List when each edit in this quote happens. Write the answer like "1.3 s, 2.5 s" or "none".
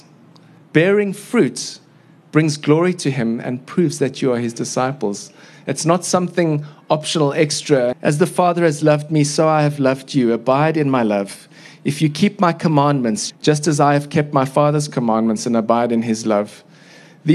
7.9 s, 13.3 s